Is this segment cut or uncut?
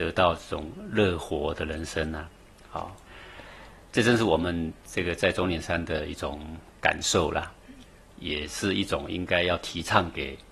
cut